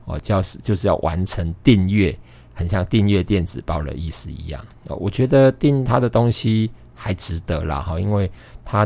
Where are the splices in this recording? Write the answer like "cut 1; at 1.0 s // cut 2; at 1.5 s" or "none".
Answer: none